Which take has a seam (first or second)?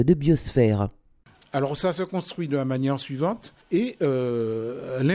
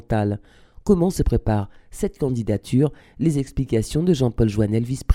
first